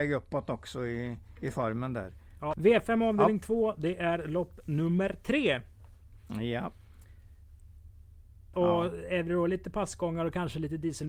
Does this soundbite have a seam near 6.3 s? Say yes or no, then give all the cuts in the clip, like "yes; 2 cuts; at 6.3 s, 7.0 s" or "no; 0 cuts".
no; 2 cuts; at 2.5 s, 8.5 s